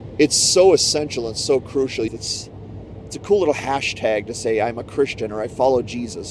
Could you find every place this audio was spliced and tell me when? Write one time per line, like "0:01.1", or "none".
0:02.1